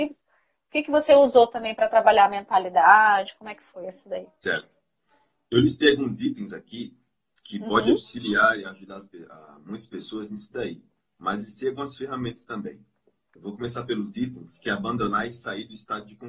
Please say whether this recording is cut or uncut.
uncut